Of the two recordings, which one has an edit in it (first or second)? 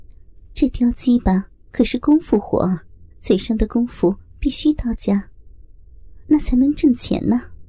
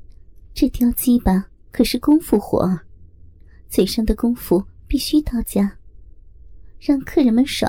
first